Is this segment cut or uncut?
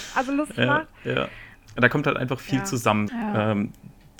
cut